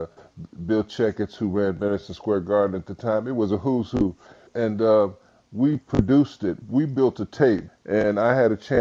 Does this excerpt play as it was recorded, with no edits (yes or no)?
no